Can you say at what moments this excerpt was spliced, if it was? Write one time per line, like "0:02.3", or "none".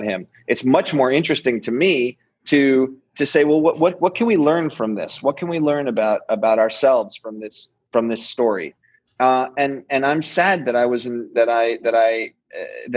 none

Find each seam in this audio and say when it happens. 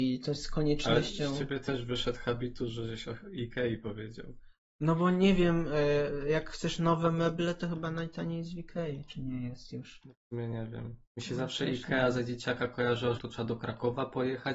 0:11.0
0:13.2

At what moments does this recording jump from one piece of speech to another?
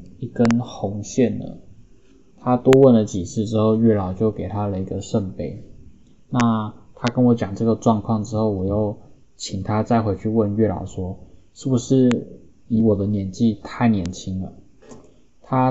0:02.3

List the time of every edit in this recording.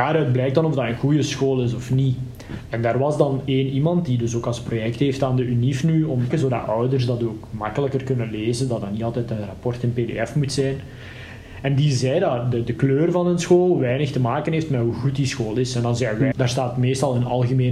0:06.3
0:16.3

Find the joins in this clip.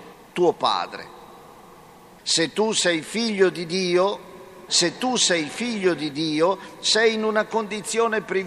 0:02.2
0:04.7

